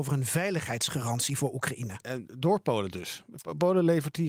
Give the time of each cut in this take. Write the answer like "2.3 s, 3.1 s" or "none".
2.0 s

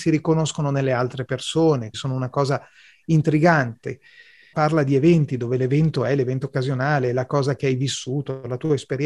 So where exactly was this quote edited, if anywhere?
1.9 s, 4.5 s

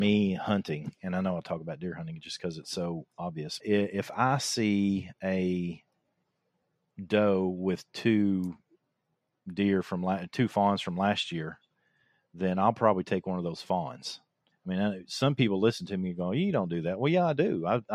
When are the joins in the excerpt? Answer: 3.6 s, 14.5 s

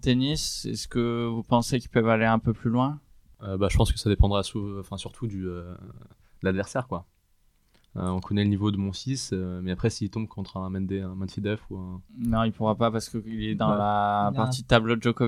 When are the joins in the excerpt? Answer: none

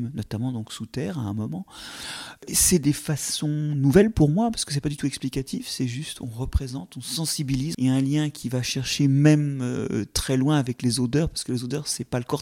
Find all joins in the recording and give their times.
7.7 s

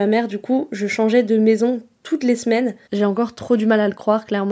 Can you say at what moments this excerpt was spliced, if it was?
2.9 s

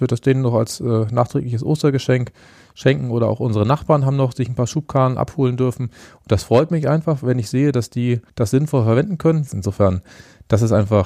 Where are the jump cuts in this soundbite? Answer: 8.3 s, 9.5 s

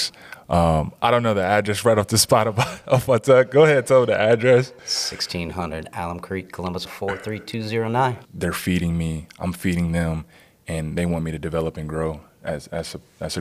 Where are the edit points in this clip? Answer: 6.9 s, 8.3 s

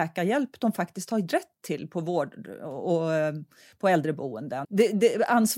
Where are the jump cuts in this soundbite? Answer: 4.6 s

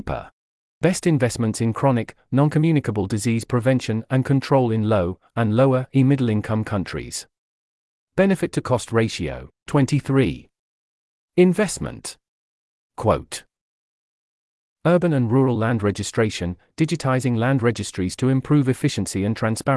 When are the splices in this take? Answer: 9.6 s, 12.9 s

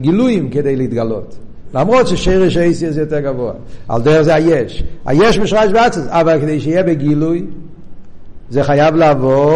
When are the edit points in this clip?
none

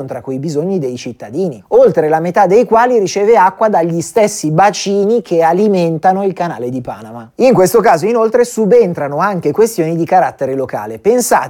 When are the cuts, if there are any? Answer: 7.3 s

